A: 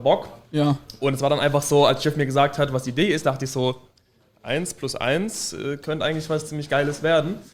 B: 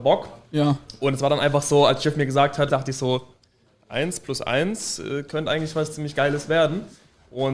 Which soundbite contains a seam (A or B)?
B